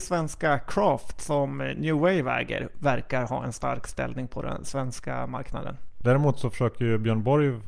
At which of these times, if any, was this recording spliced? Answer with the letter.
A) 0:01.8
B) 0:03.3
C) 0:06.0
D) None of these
C